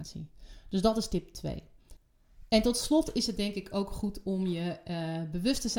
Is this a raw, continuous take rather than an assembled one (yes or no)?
yes